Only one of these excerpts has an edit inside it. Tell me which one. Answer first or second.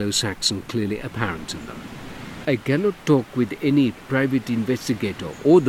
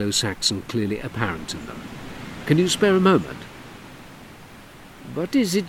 first